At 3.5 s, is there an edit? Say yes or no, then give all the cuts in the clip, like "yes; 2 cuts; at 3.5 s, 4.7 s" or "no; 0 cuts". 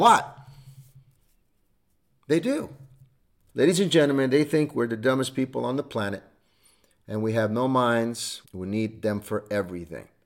yes; 2 cuts; at 3.5 s, 8.4 s